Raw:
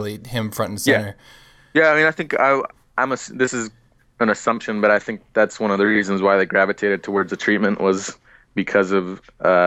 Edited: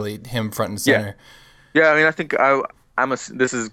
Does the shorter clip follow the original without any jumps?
yes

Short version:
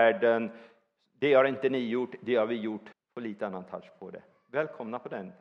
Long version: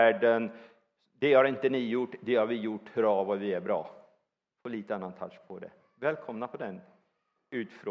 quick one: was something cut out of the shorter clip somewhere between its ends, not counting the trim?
yes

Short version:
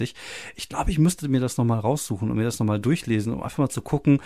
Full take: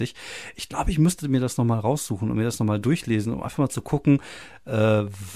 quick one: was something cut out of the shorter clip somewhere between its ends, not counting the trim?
no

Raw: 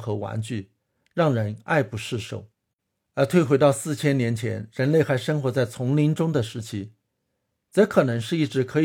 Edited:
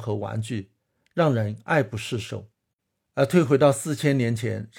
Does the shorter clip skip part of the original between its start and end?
no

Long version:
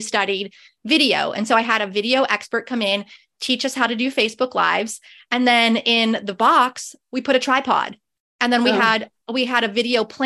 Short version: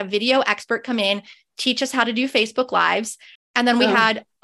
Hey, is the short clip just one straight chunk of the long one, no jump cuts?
no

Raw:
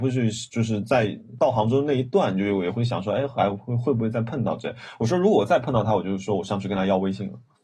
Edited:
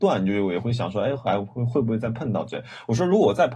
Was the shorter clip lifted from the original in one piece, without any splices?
yes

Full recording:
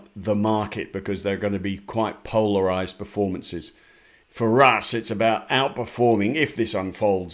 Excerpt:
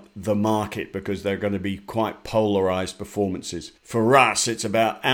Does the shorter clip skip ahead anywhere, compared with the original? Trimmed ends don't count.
yes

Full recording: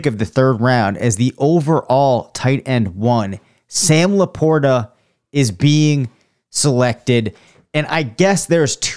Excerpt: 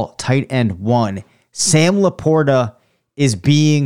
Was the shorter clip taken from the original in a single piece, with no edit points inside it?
yes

